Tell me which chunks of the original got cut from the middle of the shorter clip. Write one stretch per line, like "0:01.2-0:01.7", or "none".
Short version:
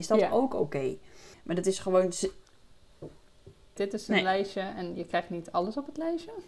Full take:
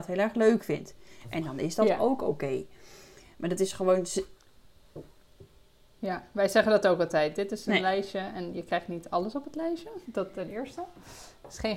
0:03.0-0:03.3
0:05.7-0:07.3